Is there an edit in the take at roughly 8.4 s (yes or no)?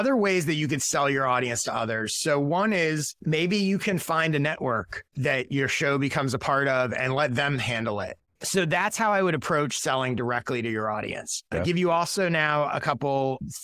yes